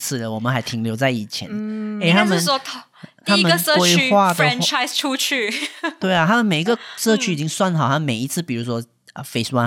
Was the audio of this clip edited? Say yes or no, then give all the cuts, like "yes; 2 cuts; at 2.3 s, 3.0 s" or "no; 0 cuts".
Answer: no; 0 cuts